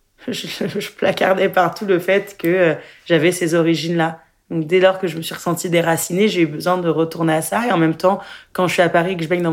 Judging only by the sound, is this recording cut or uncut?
uncut